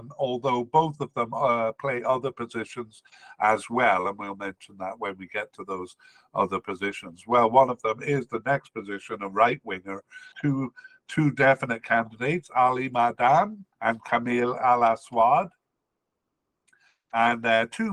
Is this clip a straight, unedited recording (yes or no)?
no